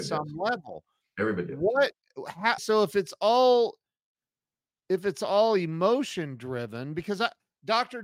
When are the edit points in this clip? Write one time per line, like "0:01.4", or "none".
0:02.6